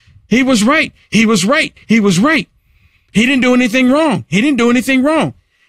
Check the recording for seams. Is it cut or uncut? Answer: uncut